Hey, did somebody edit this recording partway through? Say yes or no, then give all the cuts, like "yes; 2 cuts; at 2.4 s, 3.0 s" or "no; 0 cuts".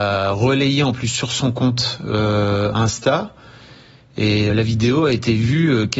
yes; 1 cut; at 4.5 s